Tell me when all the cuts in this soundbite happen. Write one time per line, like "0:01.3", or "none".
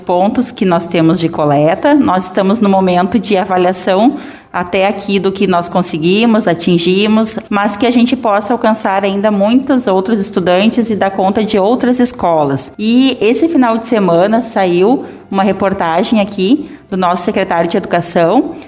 0:07.5